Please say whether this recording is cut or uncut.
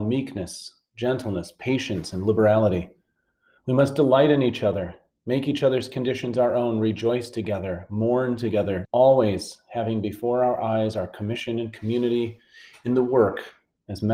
cut